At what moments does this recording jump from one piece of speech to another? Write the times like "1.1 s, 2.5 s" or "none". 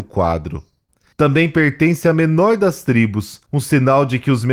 1.1 s, 3.5 s